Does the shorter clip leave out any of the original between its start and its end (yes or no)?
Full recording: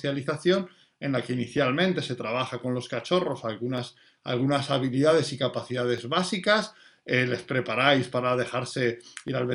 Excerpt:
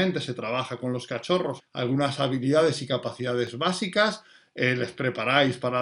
yes